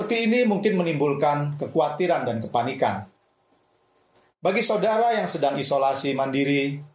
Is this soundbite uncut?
yes; 0 cuts

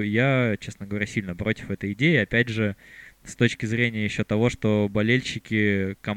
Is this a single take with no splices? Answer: yes; 0 cuts

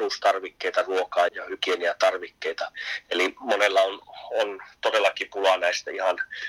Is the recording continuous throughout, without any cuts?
no; 1 cut; at 1.3 s

